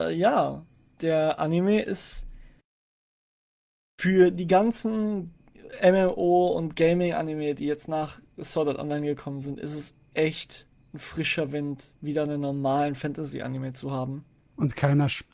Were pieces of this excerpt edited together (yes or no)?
no